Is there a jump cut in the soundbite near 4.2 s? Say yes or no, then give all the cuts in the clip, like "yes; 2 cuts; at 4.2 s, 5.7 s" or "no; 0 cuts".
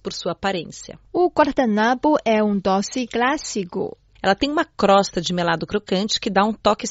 yes; 1 cut; at 4.2 s